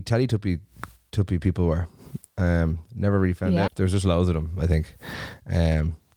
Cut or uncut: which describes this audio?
cut